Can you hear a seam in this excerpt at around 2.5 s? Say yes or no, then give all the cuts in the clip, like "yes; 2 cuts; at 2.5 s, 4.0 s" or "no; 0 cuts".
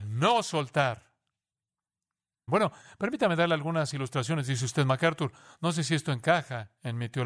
yes; 1 cut; at 2.5 s